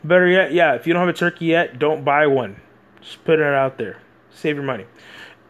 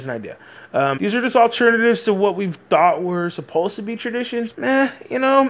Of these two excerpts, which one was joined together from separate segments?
second; 2 cuts; at 1.0 s, 4.5 s

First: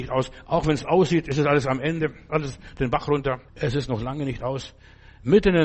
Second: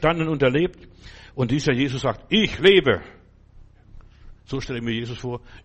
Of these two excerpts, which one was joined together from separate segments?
first; 2 cuts; at 2.3 s, 3.5 s

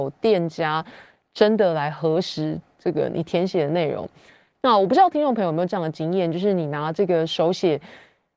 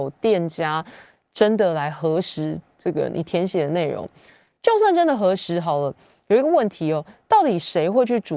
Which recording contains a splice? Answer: first; 1 cut; at 4.5 s

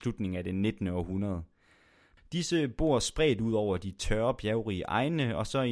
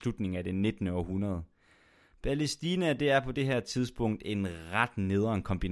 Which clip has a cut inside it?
first; 1 cut; at 2.2 s

